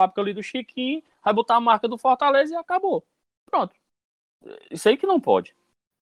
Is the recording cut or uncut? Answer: uncut